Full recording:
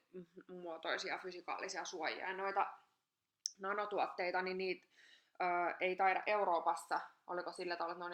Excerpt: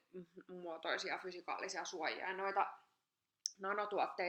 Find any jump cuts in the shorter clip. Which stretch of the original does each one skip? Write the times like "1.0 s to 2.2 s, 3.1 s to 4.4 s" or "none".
none

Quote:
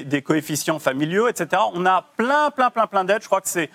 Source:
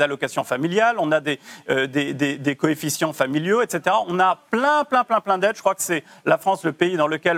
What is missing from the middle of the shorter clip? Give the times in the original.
none

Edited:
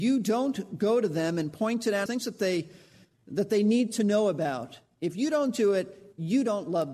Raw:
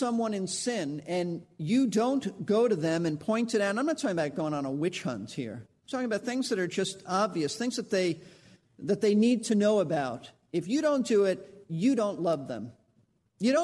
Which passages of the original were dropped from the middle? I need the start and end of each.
3.7 s to 7.6 s

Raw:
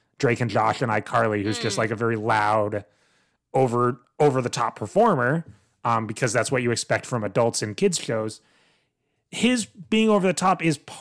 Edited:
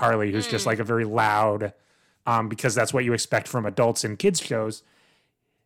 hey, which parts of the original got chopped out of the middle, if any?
3.3 s to 5.7 s

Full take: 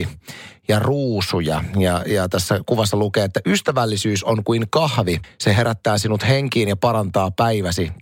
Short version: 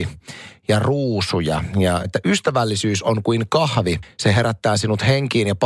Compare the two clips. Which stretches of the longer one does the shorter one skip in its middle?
2.0 s to 3.3 s

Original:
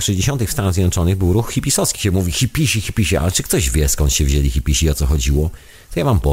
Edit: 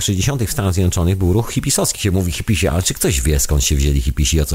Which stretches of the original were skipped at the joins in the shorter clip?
2.3 s to 2.8 s

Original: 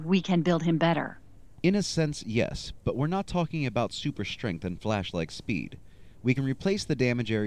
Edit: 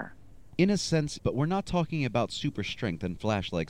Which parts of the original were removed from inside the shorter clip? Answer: 2.2 s to 2.8 s

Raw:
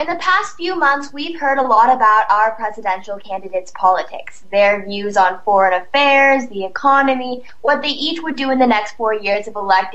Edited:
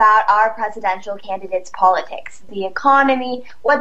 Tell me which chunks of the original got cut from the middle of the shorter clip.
4.5 s to 6.5 s

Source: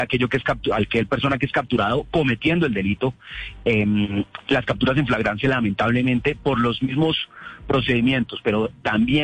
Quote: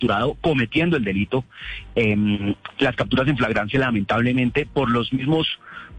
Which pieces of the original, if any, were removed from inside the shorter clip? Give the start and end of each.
none

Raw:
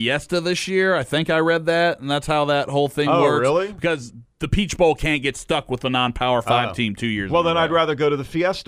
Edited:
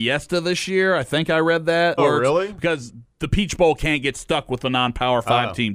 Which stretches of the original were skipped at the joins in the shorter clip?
2.0 s to 3.2 s

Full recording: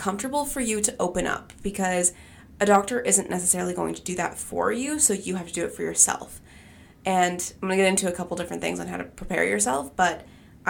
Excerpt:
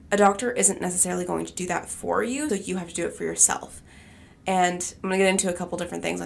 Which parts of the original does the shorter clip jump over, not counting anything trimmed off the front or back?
5.0 s to 5.1 s

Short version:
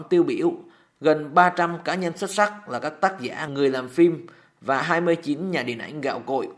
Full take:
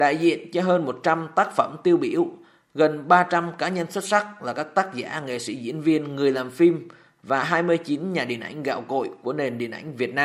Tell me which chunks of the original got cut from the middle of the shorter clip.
5.2 s to 6.1 s

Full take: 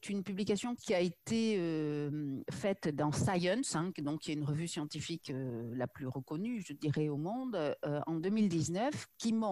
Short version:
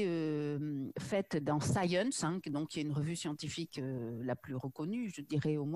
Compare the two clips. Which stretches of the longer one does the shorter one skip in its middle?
none

